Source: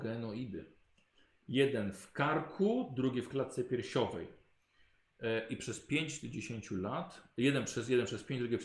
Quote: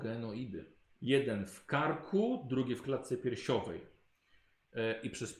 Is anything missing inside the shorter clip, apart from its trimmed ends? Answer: yes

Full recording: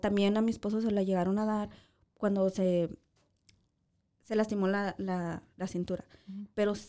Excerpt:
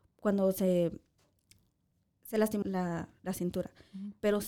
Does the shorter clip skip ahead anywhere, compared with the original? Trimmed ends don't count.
yes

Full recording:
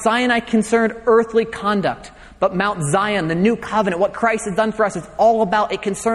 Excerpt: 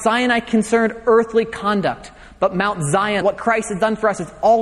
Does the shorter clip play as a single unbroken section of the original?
no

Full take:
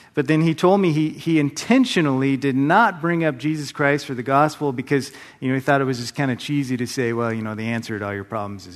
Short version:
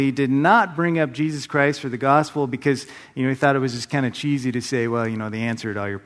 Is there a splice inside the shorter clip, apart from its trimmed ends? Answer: no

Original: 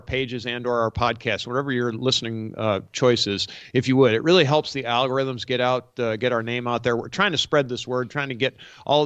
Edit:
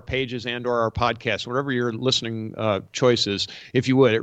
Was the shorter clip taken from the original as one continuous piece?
yes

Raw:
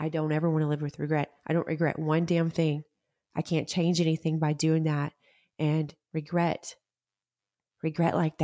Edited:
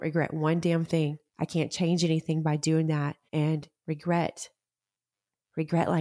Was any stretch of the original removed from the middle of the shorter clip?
yes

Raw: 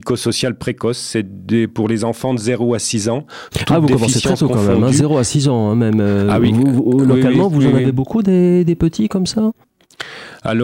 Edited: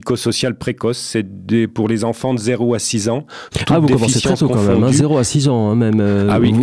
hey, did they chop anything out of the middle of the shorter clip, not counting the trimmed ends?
no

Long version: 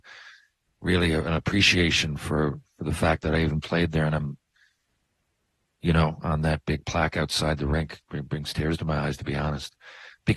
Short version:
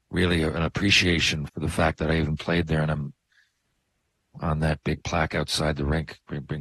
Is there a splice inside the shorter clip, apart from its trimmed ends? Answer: yes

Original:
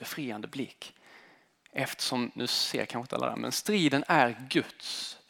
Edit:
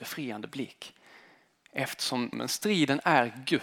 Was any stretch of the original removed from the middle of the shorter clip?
yes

